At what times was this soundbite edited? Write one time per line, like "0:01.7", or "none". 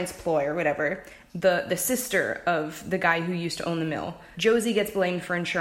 0:01.3
0:04.3